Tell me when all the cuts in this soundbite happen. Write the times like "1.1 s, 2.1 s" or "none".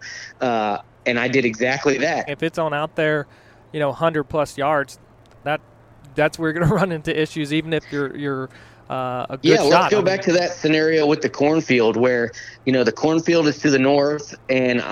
2.3 s, 5.4 s